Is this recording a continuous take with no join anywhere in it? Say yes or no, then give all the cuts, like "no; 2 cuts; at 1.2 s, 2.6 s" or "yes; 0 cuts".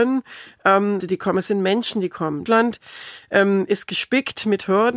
no; 2 cuts; at 1.0 s, 2.5 s